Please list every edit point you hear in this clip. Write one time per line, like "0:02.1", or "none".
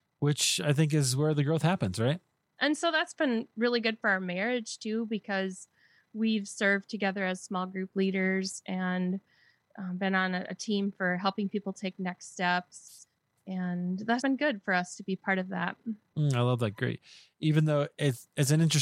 0:02.6
0:14.2